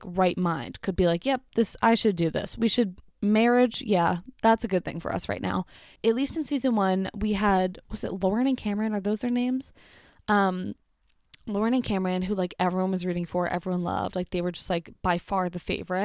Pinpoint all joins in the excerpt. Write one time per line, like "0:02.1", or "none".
0:06.0